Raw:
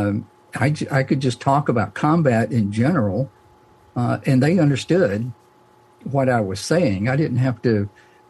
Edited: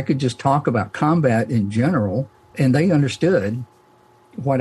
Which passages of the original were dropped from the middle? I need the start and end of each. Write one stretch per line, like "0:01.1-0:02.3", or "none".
0:03.6-0:04.2